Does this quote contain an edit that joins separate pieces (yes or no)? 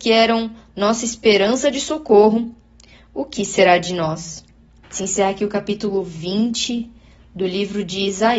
yes